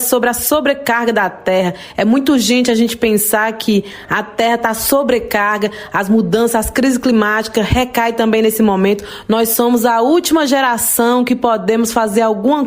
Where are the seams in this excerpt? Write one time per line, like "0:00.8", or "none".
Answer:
none